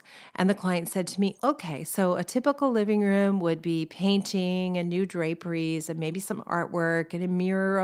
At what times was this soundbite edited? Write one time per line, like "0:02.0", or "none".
0:01.4